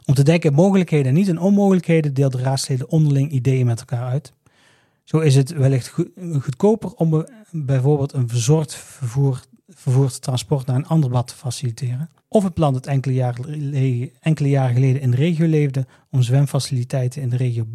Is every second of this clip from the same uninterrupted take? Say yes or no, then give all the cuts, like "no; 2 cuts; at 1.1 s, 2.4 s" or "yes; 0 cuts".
no; 2 cuts; at 12.2 s, 14.2 s